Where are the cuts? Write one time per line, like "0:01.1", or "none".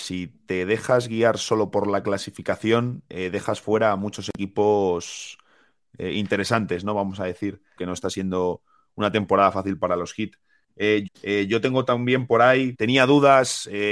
0:07.8
0:11.1
0:12.7